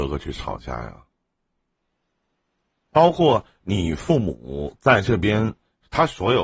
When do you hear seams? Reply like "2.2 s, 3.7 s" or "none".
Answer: none